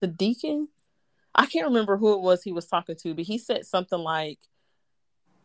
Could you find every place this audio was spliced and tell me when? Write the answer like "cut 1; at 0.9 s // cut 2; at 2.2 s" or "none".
none